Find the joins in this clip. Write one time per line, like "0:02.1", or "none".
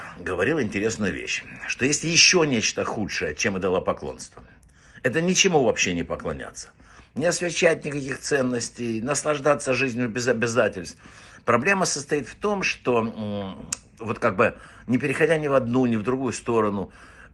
none